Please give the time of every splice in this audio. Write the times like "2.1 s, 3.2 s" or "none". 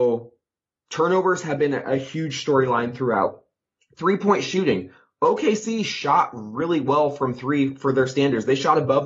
3.8 s

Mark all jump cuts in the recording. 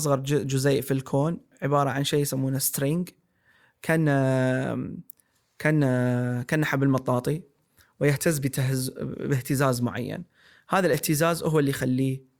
none

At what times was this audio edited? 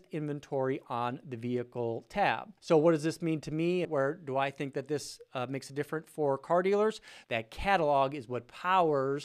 2.6 s, 3.8 s, 7.2 s

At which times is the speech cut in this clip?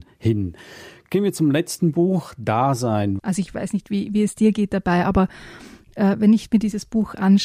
3.2 s

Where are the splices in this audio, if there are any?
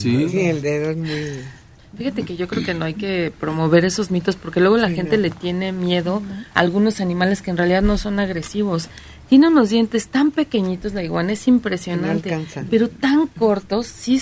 none

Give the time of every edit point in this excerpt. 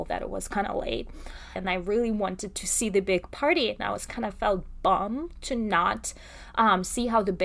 1.6 s

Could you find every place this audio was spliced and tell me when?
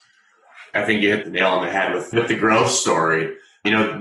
none

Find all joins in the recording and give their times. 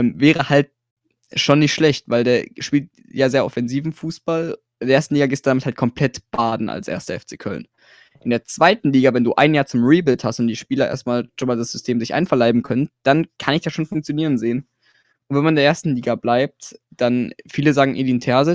16.8 s

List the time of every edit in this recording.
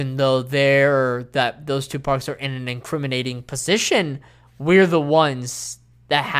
none

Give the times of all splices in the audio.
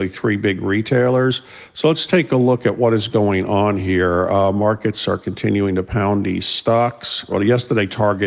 7.3 s

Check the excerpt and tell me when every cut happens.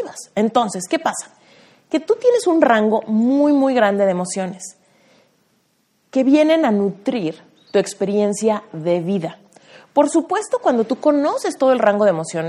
none

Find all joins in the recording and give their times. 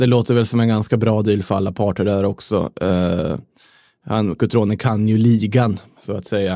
none

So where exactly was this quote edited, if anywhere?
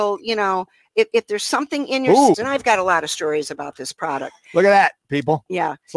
2.3 s

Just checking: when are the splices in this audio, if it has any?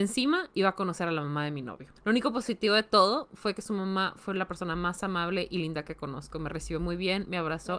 2.0 s

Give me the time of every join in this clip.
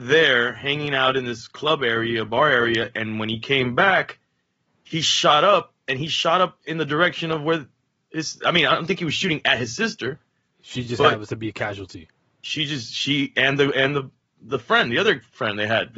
none

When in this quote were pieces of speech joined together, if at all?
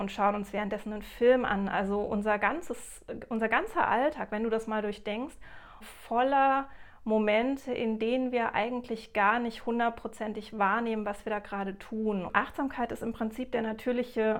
5.8 s

